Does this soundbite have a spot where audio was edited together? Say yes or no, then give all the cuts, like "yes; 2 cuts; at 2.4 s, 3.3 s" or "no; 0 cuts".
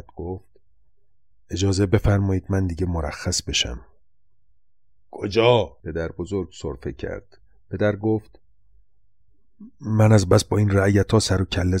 yes; 1 cut; at 5.8 s